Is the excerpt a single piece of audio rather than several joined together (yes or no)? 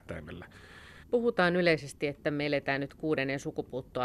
no